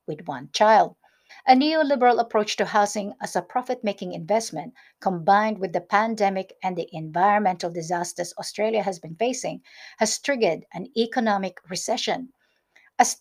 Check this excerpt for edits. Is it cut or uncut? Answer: cut